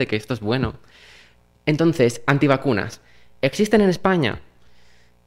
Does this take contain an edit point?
no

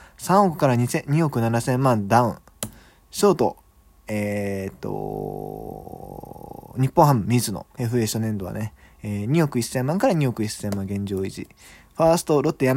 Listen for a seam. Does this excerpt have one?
yes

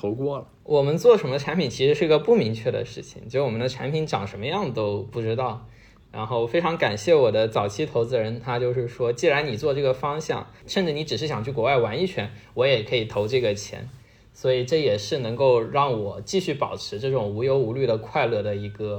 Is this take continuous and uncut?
yes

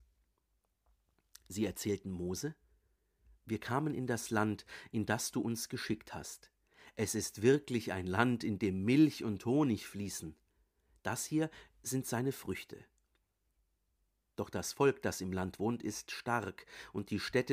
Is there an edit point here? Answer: no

